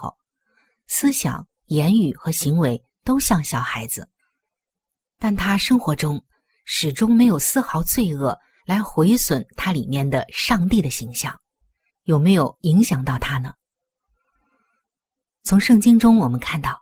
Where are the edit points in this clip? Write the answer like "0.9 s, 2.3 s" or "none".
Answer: 11.9 s